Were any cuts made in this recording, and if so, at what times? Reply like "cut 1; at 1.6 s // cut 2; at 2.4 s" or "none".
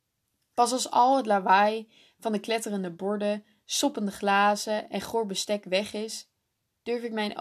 none